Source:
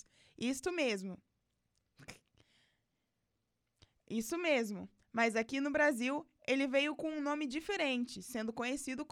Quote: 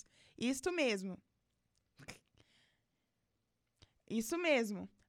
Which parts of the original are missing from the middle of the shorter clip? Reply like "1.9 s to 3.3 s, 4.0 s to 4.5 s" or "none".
none

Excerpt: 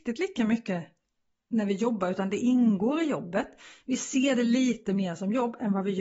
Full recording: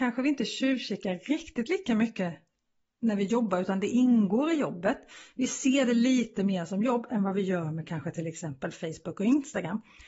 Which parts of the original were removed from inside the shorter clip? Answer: none

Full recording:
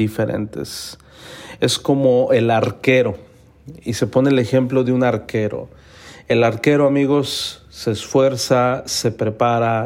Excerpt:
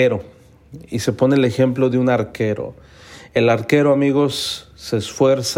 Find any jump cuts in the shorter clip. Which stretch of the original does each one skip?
none

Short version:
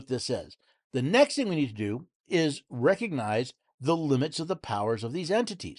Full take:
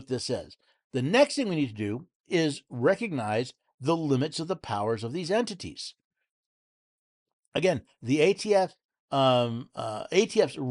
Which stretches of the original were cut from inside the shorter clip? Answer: none

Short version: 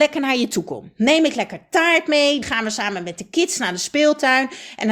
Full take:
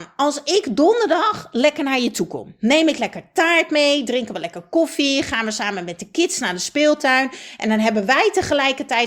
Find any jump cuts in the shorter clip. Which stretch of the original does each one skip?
4.1 s to 5.2 s

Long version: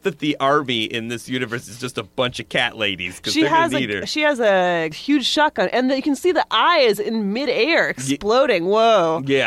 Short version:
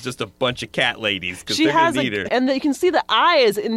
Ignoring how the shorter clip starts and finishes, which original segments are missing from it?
4.1 s to 5.7 s

